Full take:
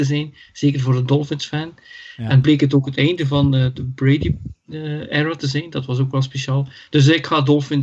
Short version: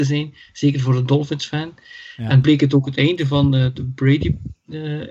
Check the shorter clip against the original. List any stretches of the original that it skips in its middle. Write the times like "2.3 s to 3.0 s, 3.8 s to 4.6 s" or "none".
none